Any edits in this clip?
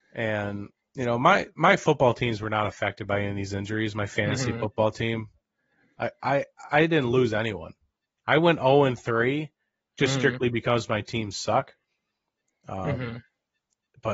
no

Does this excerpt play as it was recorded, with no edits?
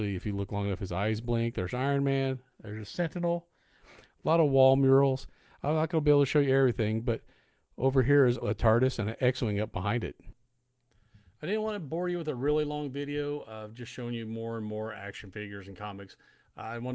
no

